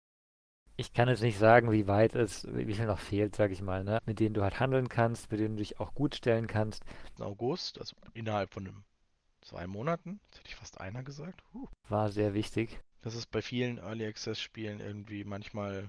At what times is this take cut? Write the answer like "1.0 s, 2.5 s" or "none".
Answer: 4.0 s, 7.2 s, 12.8 s